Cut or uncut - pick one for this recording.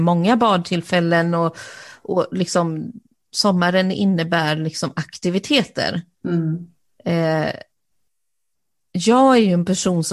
uncut